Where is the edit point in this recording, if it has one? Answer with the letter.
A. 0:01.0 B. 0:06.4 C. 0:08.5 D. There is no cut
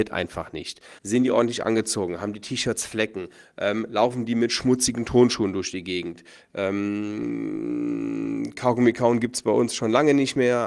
A